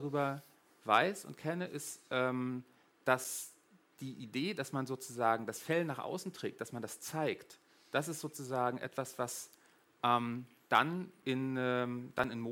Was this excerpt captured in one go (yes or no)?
yes